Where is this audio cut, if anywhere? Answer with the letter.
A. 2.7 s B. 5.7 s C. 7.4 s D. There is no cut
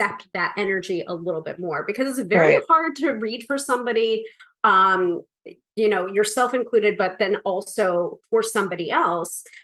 B